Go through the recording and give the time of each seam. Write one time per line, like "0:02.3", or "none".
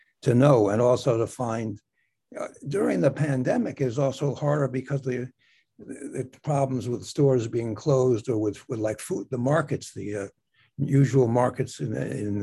none